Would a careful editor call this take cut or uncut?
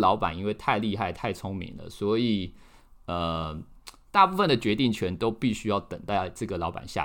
uncut